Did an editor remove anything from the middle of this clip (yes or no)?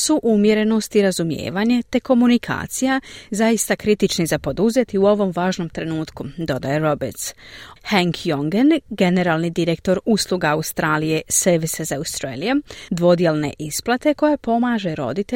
yes